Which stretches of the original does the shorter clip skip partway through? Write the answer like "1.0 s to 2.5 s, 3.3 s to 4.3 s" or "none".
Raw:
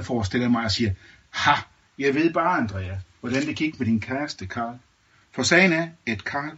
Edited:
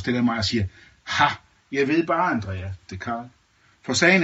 3.2 s to 4.4 s